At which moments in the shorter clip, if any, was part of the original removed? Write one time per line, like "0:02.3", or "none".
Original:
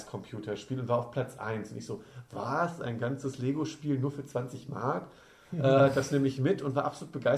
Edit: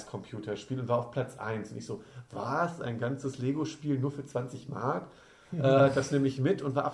none

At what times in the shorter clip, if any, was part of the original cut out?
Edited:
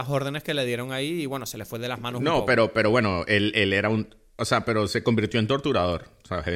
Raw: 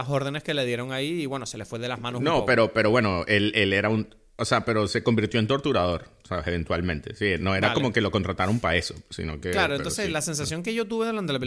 none

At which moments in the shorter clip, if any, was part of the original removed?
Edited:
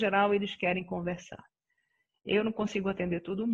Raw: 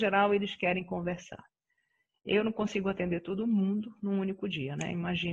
none

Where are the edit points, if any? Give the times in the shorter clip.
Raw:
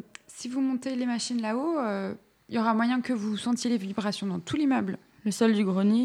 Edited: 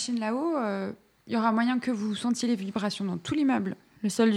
none

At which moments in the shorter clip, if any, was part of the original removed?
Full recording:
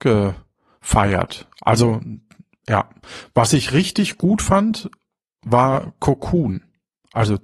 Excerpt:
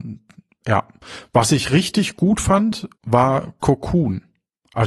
0:02.9

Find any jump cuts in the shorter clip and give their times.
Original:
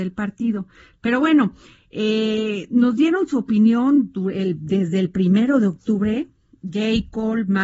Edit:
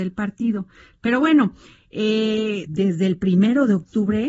0:02.7

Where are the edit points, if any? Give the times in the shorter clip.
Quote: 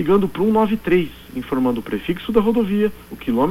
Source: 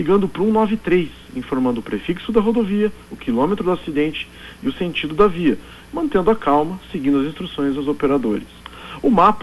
none

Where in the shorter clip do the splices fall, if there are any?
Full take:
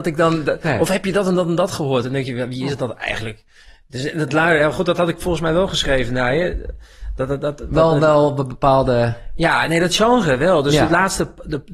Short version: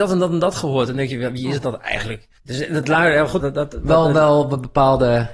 0:02.4
0:03.4

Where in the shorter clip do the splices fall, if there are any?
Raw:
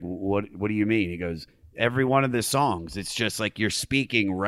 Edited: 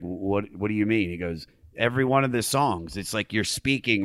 0:03.1

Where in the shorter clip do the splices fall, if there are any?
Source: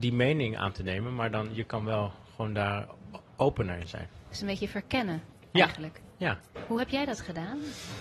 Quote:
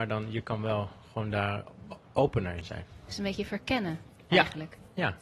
none

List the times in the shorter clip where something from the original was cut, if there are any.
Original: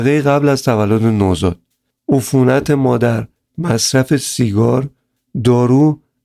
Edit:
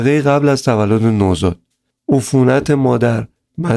none

